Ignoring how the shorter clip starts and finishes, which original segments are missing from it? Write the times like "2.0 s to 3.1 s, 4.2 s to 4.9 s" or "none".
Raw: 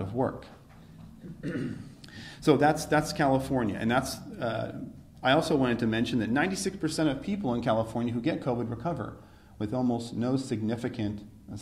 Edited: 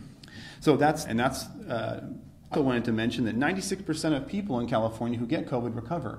2.9 s to 3.8 s, 5.2 s to 5.5 s